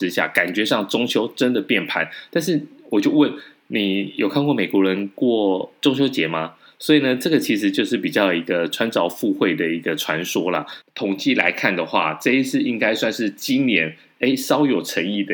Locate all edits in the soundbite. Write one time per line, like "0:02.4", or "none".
0:10.8